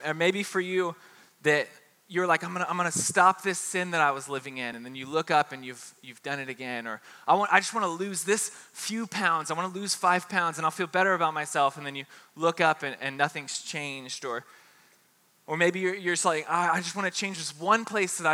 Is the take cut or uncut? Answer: uncut